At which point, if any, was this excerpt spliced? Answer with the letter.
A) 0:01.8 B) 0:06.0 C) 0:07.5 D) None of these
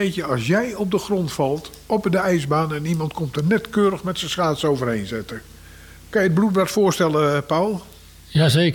D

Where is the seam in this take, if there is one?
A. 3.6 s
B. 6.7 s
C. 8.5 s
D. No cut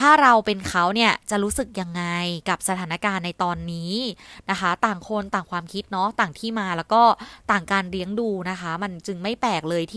D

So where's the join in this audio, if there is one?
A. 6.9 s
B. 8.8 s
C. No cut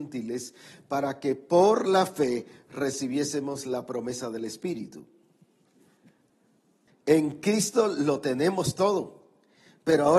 A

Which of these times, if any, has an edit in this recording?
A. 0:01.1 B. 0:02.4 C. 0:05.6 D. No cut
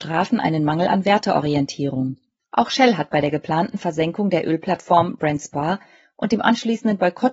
B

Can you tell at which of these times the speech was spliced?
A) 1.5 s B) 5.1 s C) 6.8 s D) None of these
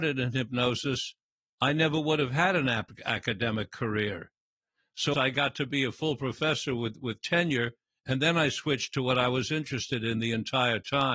B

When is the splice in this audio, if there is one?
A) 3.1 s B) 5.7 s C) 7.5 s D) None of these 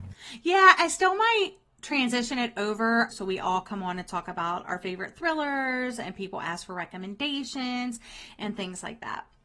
A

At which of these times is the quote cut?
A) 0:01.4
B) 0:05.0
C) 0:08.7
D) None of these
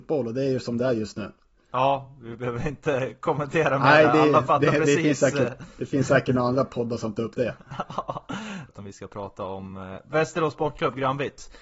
C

